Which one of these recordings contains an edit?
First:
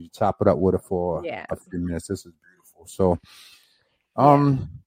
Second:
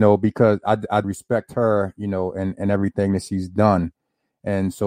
second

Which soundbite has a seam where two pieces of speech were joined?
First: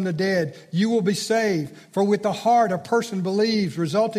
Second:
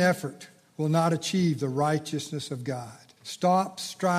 second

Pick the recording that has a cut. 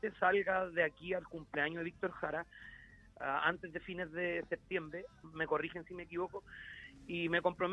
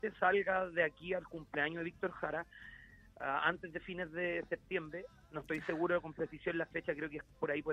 first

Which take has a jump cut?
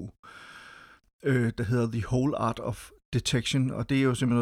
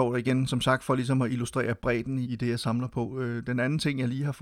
second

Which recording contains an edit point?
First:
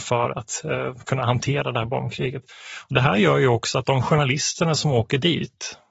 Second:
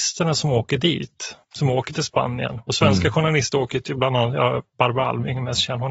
second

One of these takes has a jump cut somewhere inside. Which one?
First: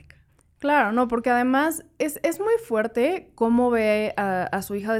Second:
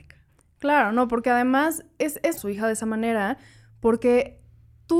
second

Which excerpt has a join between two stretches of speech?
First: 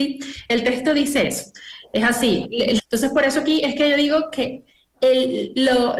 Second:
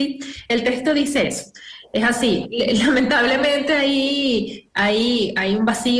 first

